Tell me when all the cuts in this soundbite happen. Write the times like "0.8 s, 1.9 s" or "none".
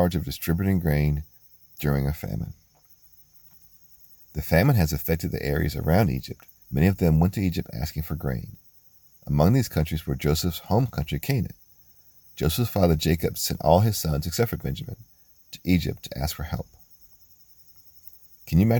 6.6 s